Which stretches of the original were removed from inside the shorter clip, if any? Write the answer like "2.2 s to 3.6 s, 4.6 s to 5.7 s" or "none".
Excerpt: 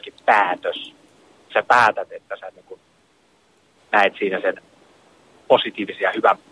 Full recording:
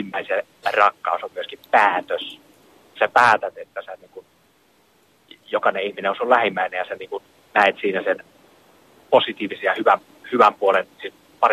5.2 s to 7.4 s